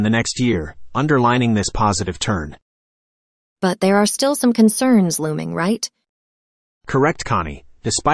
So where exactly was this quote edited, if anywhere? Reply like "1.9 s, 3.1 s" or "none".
none